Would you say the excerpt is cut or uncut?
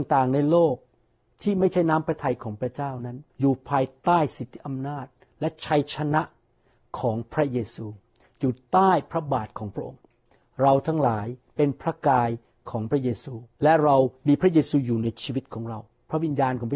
cut